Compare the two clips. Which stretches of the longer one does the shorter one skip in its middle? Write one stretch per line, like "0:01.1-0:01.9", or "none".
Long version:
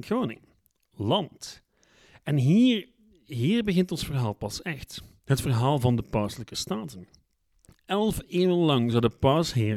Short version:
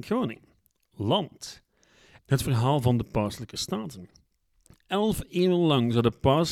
0:02.2-0:05.2